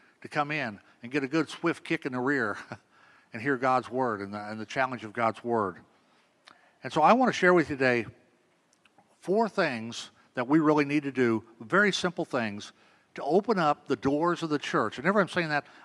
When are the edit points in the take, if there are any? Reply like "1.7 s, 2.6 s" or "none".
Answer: none